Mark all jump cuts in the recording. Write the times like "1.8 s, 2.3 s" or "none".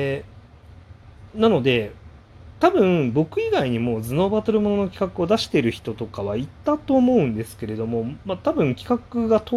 none